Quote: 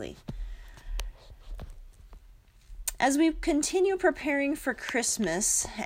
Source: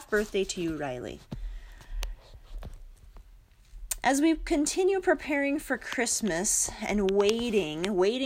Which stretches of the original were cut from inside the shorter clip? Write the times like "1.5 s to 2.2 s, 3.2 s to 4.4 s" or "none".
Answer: none